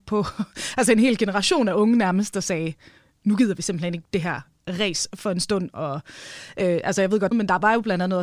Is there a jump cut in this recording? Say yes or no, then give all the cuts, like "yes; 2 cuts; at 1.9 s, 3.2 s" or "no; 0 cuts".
yes; 1 cut; at 7.3 s